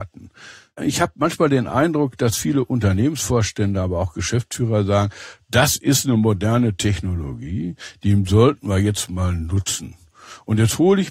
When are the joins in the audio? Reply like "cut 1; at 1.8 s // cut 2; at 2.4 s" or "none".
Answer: none